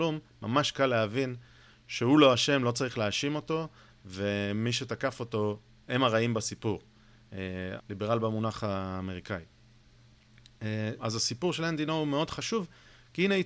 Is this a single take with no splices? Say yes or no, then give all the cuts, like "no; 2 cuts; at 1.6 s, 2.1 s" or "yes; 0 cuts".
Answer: no; 2 cuts; at 7.8 s, 11.0 s